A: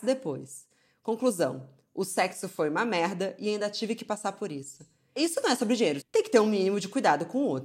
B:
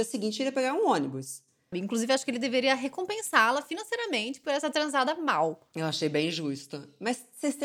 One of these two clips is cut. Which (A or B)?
B